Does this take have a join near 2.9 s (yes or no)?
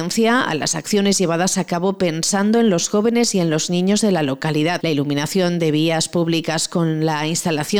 no